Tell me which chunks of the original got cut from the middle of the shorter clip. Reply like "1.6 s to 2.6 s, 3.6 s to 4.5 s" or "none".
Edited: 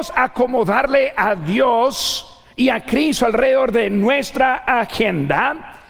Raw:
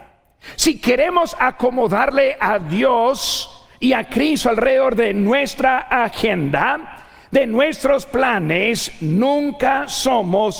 none